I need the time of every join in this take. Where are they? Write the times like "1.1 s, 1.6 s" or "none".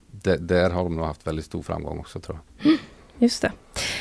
none